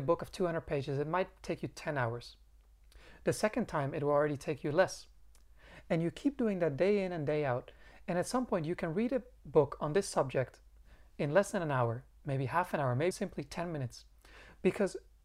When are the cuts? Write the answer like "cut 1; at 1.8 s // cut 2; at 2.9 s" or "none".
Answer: cut 1; at 13.1 s

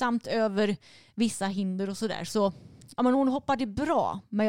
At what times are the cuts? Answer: none

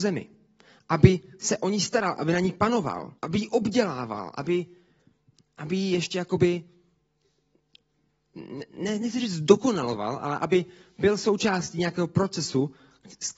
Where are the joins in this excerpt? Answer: cut 1; at 3.2 s

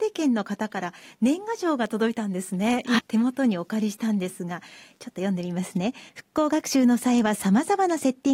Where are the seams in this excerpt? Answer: cut 1; at 3.0 s // cut 2; at 6.1 s

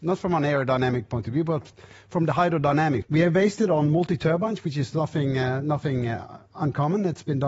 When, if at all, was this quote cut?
cut 1; at 3.0 s

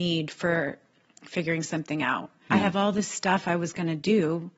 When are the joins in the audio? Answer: cut 1; at 2.5 s

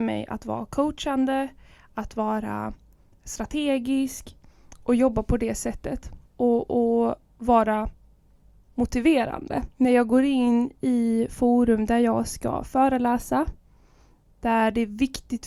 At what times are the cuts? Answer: cut 1; at 6.3 s // cut 2; at 9.7 s

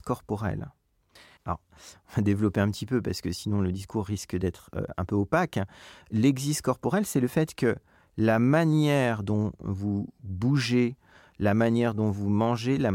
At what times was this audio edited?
cut 1; at 1.4 s

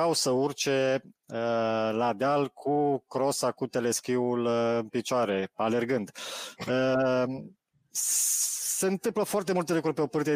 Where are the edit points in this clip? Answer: none

